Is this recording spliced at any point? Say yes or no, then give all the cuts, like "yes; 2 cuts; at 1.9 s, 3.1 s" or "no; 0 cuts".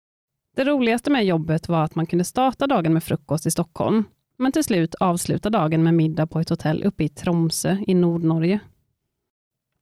yes; 1 cut; at 4.3 s